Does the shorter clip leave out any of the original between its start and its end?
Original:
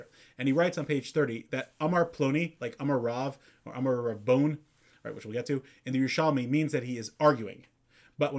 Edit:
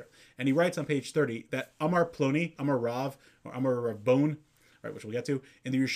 yes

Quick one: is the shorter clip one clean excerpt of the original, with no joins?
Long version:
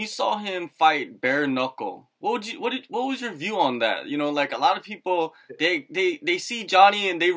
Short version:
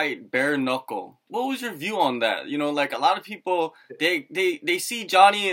no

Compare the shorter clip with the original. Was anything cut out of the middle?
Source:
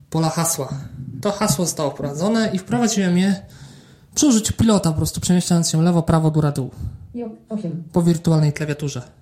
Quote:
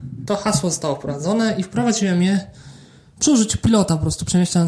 no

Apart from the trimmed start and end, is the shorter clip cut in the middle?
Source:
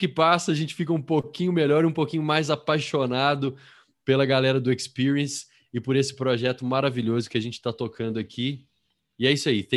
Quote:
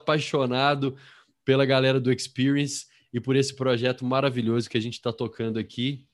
no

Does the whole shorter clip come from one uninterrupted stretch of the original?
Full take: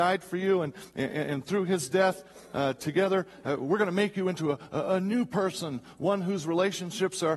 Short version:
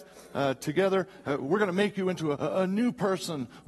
no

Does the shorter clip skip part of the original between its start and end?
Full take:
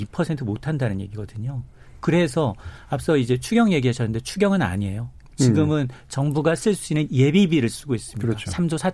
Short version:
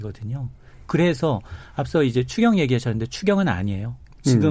no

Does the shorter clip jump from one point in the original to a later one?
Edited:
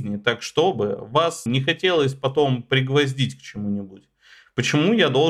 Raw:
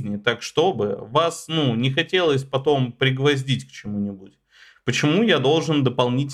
yes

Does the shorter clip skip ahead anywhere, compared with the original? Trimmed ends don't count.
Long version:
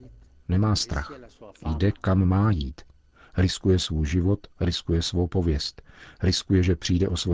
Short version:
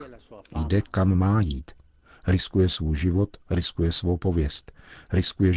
no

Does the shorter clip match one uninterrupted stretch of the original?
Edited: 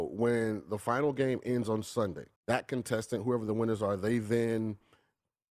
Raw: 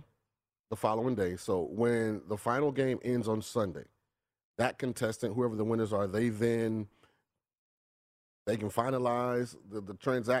no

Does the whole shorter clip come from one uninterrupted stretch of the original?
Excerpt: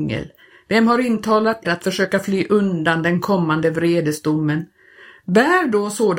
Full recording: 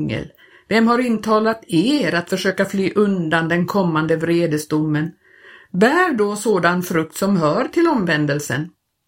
no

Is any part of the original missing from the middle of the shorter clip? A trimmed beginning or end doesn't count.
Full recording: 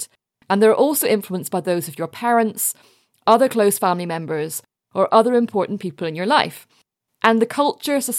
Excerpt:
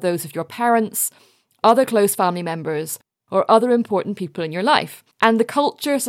yes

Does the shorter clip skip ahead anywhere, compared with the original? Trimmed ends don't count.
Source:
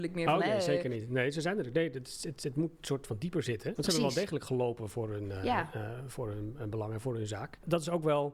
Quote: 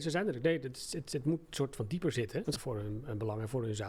yes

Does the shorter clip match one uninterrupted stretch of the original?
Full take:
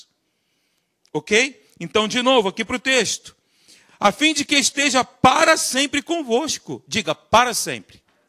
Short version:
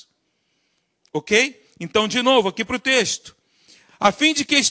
yes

